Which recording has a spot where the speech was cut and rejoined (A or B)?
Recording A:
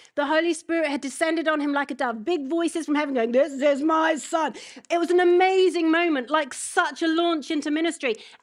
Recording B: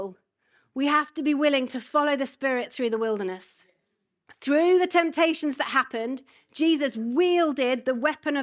B